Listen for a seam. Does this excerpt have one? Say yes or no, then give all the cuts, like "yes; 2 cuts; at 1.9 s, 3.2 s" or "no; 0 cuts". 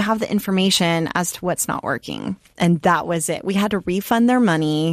yes; 1 cut; at 2.5 s